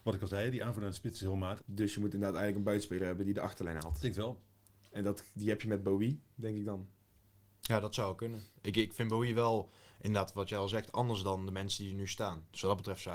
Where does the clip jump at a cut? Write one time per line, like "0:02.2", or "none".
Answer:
0:01.6